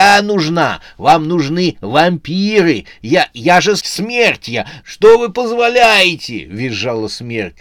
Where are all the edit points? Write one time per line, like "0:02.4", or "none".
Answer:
0:03.8
0:04.8